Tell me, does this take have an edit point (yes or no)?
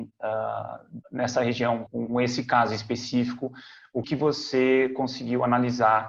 yes